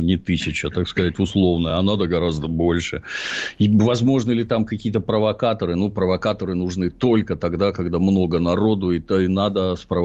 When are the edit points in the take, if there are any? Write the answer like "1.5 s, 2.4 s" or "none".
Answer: none